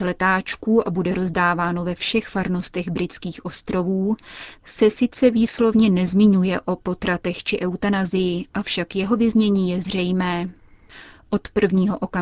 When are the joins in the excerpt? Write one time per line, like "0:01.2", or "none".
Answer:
none